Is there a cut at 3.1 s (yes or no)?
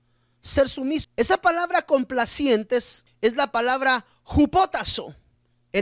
yes